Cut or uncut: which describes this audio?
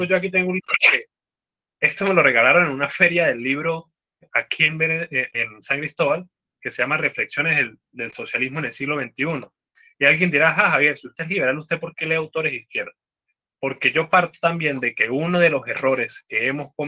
uncut